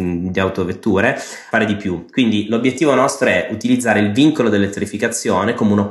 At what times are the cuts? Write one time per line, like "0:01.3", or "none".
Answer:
0:01.5